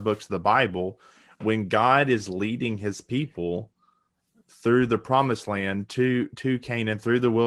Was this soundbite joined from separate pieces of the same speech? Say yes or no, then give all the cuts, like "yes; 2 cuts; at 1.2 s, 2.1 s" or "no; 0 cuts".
no; 0 cuts